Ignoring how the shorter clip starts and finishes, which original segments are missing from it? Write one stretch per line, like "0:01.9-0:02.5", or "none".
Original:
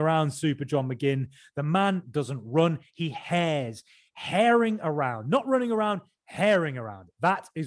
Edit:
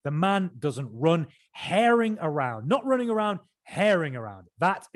0:02.9-0:04.0